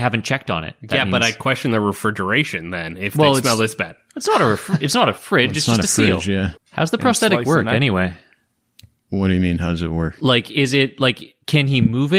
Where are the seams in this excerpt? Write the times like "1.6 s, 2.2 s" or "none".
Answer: 6.5 s